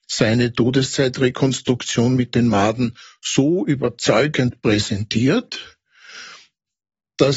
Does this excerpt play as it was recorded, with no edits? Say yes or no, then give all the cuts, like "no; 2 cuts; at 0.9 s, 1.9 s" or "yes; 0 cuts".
yes; 0 cuts